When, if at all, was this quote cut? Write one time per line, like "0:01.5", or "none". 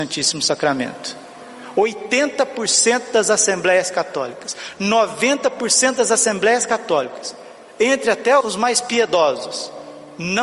0:08.4